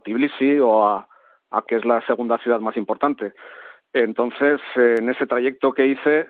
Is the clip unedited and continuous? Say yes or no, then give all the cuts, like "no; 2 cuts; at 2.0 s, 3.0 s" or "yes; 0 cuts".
no; 1 cut; at 1.6 s